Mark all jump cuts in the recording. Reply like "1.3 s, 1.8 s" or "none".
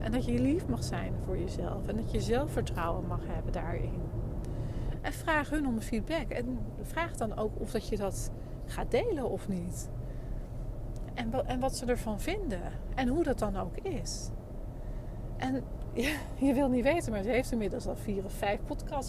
5.0 s